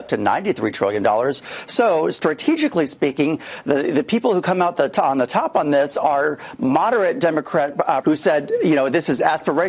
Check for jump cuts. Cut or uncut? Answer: cut